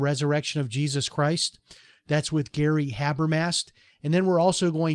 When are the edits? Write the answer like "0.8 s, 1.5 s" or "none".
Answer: none